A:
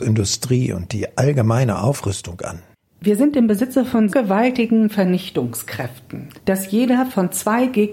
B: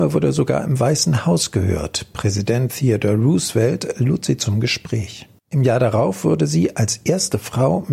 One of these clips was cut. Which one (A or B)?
A